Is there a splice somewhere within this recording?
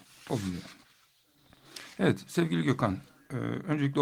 no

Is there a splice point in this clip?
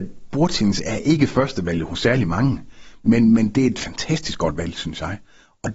no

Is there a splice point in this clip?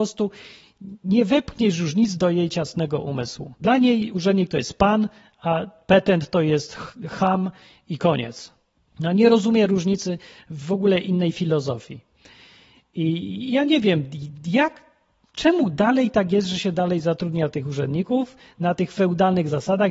yes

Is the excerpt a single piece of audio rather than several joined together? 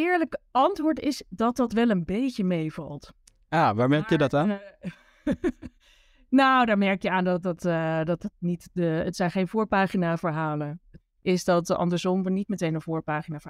no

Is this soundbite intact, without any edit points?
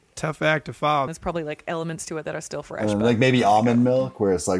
no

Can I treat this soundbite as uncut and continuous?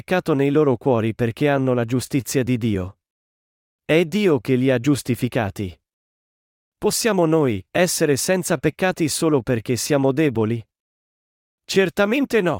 no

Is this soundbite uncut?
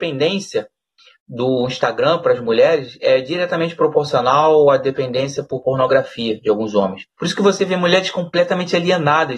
no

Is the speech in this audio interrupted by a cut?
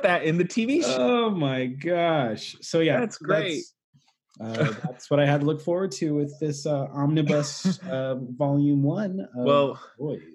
no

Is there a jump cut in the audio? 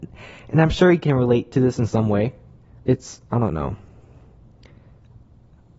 yes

